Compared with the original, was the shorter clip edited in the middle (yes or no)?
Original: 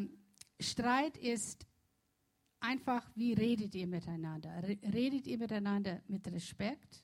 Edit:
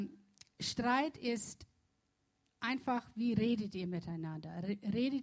no